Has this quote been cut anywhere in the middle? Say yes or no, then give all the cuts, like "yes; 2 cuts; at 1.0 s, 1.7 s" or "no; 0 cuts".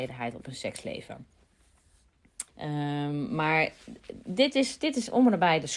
yes; 1 cut; at 2.5 s